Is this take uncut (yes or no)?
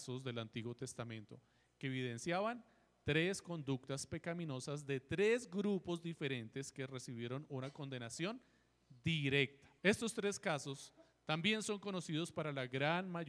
no